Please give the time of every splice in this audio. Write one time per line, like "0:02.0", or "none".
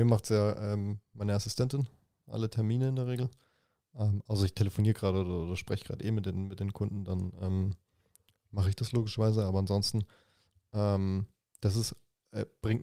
none